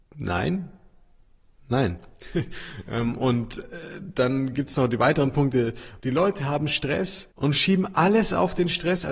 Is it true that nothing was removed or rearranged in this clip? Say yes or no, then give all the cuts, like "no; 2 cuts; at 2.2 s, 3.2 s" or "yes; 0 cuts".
no; 2 cuts; at 6.0 s, 7.3 s